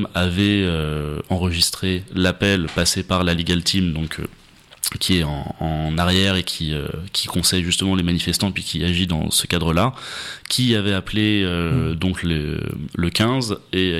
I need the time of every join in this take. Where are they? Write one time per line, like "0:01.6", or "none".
none